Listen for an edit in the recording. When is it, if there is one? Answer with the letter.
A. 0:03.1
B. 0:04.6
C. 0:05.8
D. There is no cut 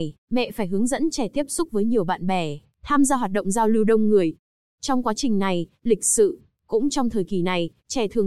C